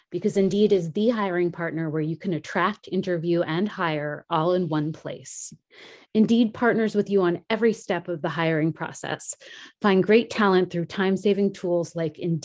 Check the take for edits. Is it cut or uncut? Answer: cut